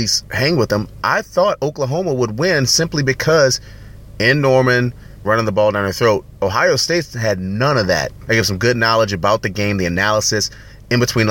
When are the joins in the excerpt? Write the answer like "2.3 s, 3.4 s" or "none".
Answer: 5.2 s, 8.3 s